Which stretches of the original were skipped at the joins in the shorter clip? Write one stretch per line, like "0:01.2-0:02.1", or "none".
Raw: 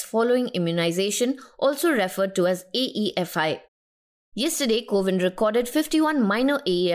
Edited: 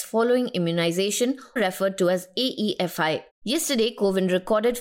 0:01.6-0:01.9
0:03.7-0:04.2